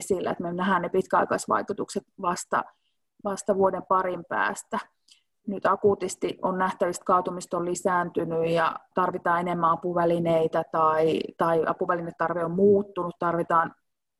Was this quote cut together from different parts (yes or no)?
yes